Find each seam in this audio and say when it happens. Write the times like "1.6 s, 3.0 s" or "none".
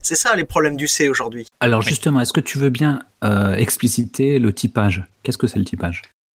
1.5 s